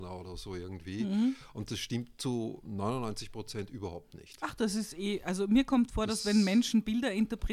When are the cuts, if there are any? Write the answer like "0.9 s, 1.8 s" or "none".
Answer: none